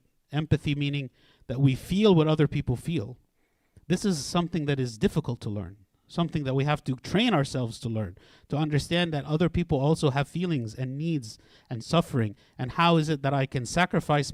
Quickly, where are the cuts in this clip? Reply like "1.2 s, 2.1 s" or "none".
none

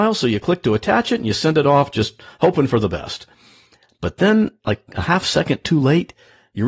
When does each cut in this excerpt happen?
none

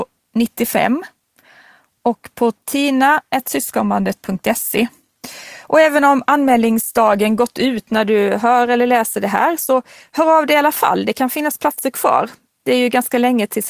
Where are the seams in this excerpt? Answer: none

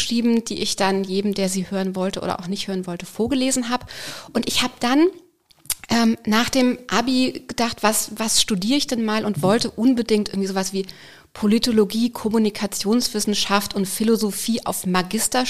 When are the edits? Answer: none

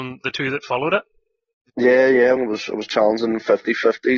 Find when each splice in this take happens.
2.4 s

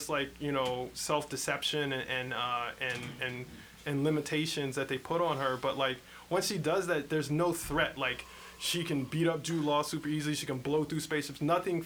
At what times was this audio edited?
none

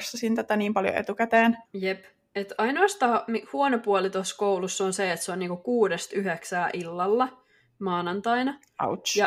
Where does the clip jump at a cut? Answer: 1.7 s

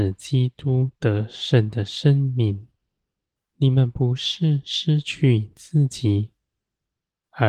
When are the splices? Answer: 3.5 s

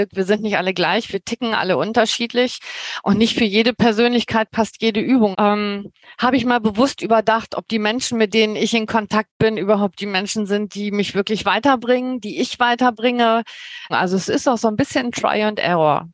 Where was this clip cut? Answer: 5.3 s, 13.9 s

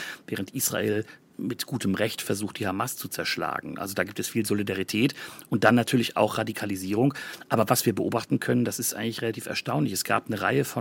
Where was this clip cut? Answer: none

